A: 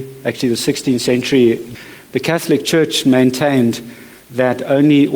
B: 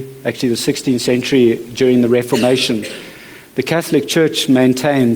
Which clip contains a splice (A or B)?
A